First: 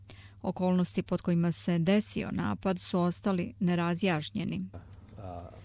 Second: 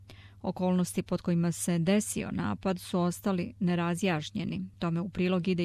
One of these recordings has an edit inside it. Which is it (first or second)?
first